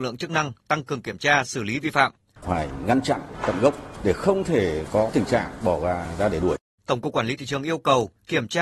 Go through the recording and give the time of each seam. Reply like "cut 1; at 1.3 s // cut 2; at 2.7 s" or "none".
cut 1; at 2.4 s // cut 2; at 6.8 s